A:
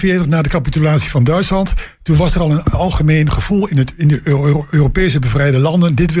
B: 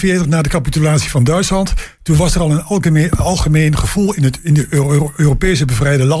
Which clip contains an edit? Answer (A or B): A